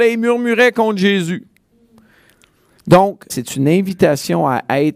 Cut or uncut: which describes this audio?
cut